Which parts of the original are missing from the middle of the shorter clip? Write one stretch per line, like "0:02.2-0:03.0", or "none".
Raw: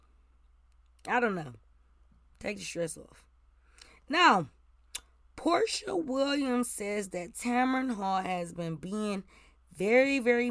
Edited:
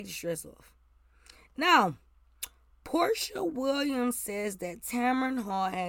none